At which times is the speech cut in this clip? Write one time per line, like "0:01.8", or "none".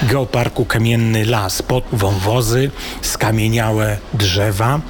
0:01.9
0:03.0